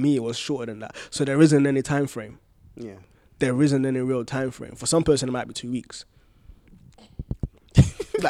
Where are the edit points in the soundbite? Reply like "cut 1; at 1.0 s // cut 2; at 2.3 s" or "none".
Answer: none